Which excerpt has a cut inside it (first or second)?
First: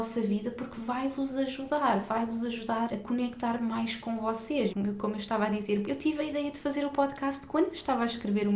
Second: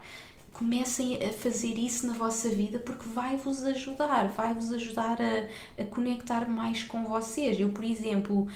first